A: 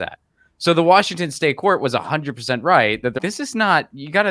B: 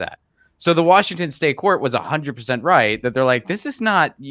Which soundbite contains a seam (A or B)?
A